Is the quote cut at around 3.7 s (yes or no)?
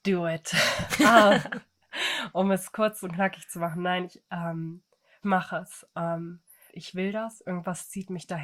no